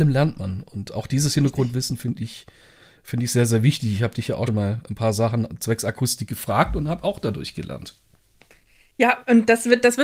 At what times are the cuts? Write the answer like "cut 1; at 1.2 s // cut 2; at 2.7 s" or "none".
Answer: cut 1; at 4.5 s

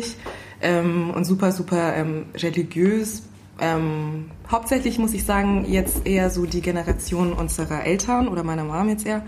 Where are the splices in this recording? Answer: none

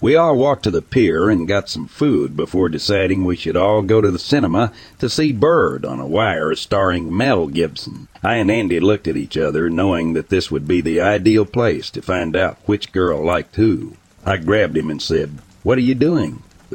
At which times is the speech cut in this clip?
cut 1; at 8.1 s // cut 2; at 14.2 s

